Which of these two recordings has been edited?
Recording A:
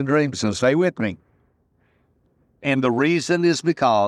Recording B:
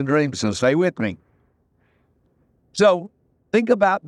A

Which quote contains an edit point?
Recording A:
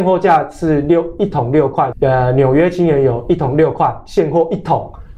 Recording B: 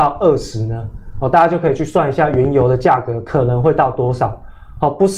A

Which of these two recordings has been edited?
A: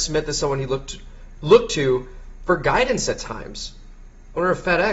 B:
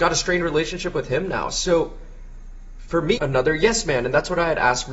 B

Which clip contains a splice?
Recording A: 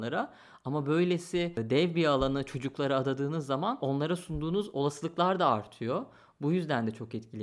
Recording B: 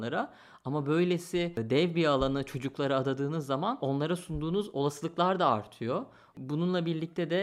B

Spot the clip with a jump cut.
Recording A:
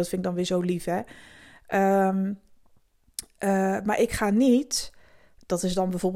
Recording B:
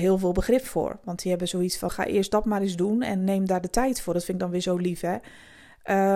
B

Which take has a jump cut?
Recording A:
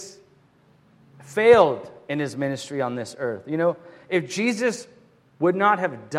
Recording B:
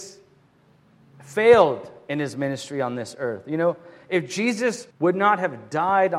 B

